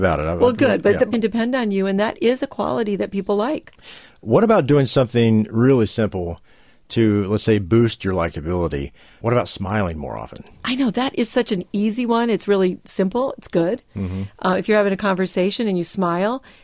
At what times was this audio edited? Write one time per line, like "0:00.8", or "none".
0:01.1